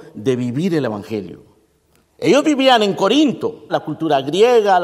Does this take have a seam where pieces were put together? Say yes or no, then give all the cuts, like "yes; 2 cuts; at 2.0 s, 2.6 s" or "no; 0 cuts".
yes; 2 cuts; at 2.0 s, 3.7 s